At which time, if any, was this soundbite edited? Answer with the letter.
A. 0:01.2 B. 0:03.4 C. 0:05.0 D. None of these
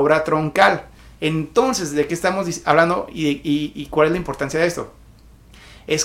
D